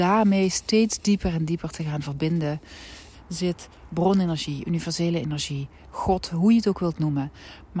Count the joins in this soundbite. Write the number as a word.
one